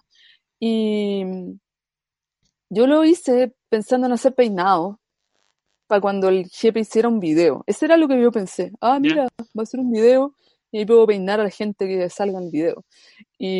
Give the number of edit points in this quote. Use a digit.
0